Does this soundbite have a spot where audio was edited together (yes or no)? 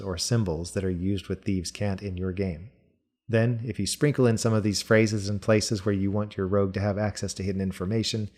no